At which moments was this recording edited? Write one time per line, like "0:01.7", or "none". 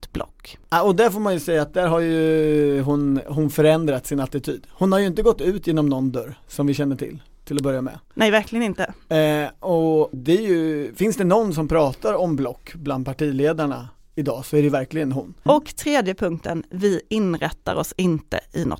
0:10.1
0:15.5